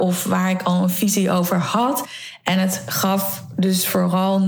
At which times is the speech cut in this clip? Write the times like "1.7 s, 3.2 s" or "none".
none